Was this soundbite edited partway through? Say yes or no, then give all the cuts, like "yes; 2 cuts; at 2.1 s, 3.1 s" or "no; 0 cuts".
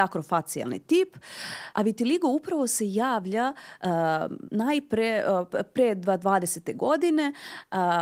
yes; 1 cut; at 1.7 s